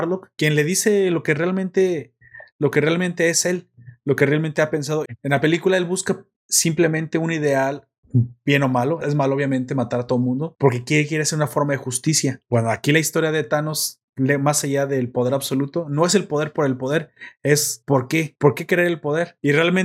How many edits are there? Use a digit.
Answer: 3